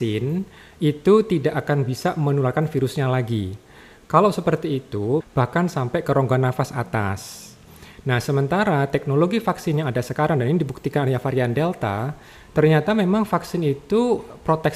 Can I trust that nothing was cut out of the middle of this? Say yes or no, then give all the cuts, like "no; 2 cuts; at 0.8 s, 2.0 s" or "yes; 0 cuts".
no; 1 cut; at 5.2 s